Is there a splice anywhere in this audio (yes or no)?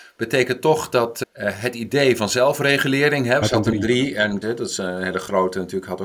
yes